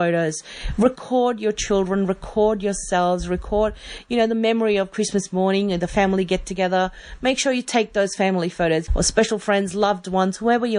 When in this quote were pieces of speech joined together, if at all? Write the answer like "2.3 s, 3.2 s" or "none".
8.9 s